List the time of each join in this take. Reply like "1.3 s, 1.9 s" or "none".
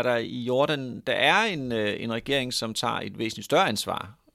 none